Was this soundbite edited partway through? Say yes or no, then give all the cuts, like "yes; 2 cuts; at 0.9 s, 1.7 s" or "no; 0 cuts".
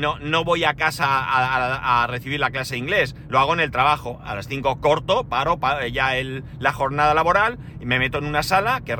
no; 0 cuts